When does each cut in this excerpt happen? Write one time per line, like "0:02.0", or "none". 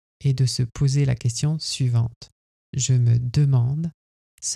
none